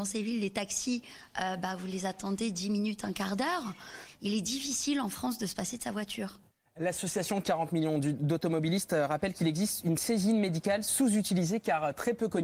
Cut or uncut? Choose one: uncut